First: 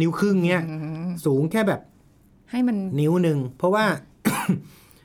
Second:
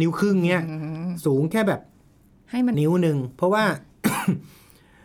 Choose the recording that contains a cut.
second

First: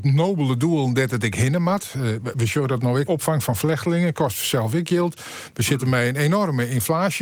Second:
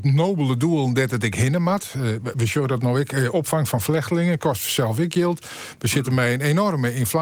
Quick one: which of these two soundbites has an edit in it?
first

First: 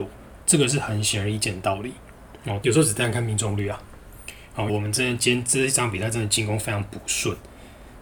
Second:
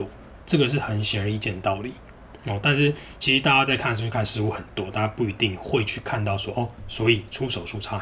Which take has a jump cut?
first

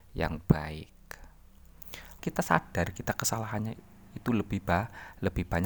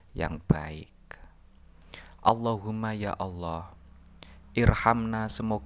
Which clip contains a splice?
first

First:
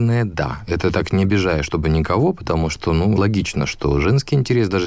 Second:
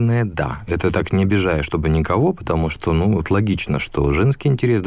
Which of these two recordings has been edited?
first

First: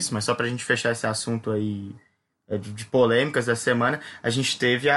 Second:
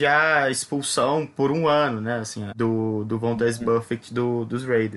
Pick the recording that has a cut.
second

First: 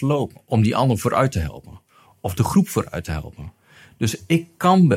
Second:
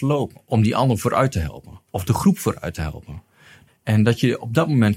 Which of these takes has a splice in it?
second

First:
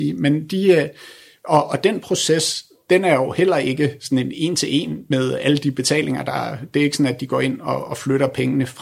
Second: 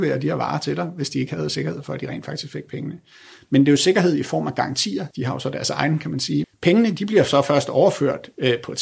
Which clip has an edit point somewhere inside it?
second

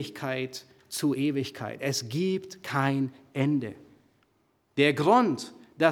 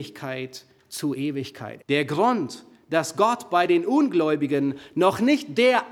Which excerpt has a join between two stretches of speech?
second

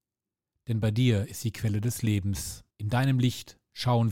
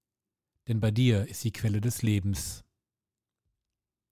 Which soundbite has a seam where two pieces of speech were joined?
first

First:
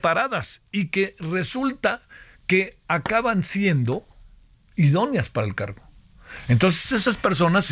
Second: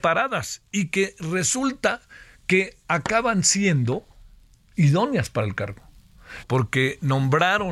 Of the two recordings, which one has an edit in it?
second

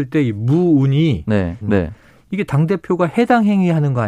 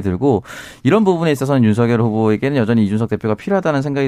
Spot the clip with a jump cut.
first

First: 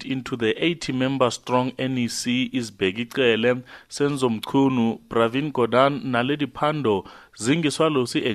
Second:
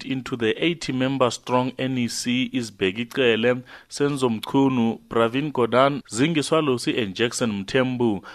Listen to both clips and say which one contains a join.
second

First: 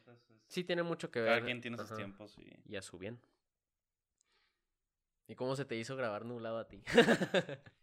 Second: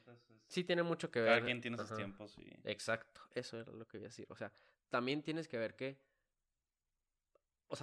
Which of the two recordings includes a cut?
first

